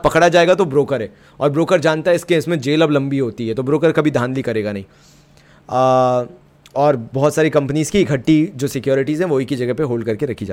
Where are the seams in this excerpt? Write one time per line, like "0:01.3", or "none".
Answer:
none